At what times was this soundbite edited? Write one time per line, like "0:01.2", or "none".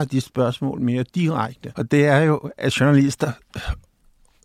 0:01.7